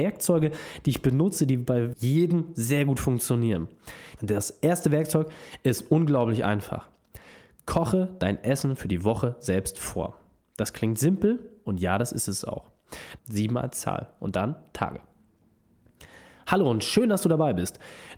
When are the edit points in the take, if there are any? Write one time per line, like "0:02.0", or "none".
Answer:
0:01.9
0:04.2
0:13.2

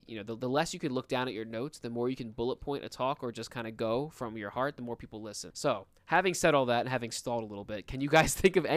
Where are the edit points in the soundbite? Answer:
0:05.5

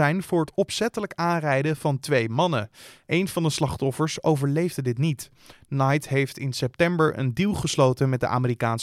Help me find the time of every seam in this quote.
none

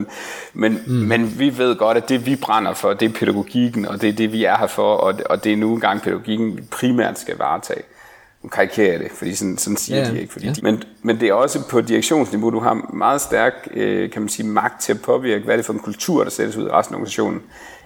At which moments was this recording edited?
0:10.6

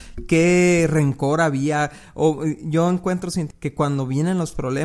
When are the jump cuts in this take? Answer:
0:03.5

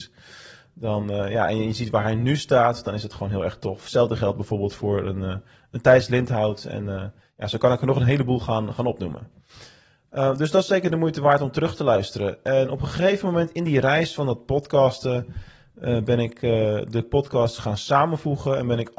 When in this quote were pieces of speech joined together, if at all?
none

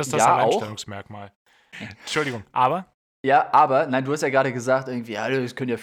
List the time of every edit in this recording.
0:01.7

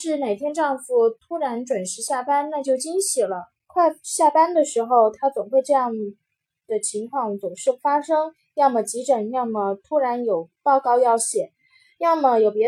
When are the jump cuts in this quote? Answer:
0:03.6

